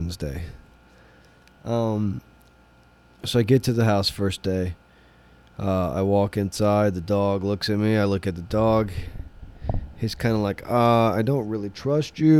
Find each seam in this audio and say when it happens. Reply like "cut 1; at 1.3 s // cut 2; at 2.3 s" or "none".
none